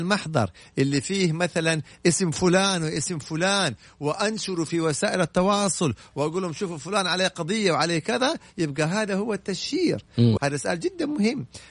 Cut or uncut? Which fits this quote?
cut